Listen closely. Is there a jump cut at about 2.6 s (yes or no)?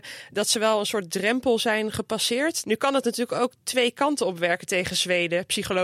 yes